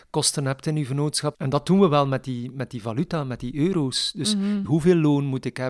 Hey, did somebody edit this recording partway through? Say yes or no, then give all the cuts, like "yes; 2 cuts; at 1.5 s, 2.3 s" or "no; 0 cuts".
yes; 2 cuts; at 1.3 s, 4.7 s